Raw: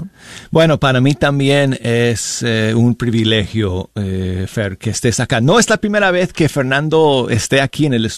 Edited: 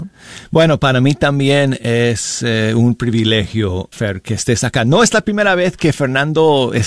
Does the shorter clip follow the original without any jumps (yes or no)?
no